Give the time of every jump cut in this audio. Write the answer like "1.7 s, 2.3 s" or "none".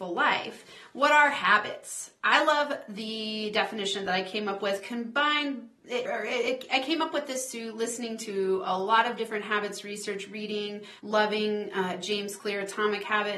6.1 s, 11.0 s